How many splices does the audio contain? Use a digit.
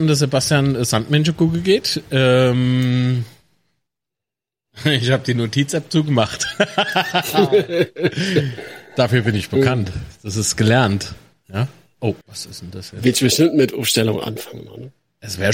1